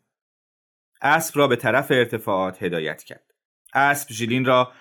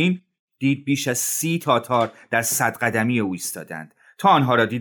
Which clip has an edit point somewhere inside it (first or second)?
first